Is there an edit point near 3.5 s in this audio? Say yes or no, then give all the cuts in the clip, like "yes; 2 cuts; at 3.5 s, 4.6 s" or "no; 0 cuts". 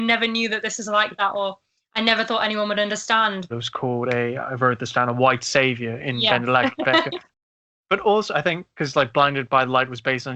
yes; 1 cut; at 3.5 s